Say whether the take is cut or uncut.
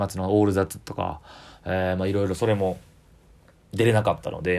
uncut